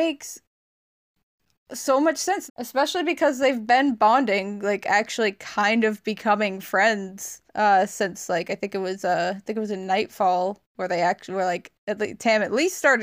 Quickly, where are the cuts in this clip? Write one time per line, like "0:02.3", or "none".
0:02.5
0:07.5